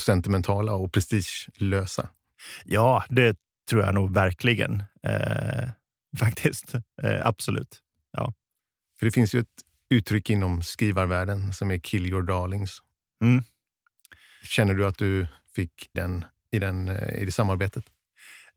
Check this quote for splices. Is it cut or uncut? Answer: cut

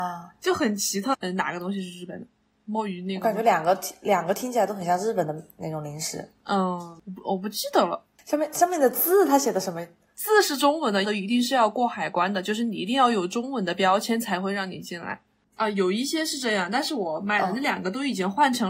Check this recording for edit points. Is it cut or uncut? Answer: cut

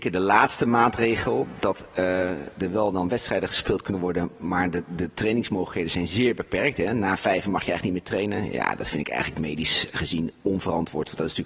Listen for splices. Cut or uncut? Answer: uncut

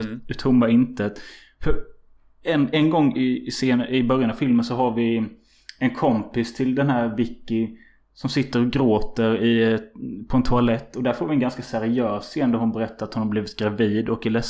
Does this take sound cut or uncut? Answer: uncut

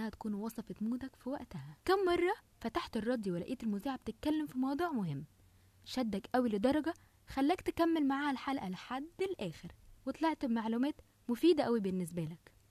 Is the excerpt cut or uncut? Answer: cut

